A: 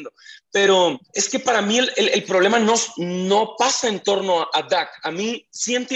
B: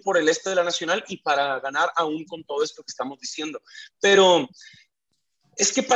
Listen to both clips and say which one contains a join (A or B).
A